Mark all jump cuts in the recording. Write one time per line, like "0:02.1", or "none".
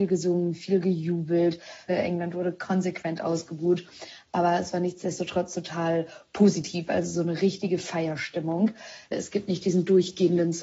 0:01.9
0:09.1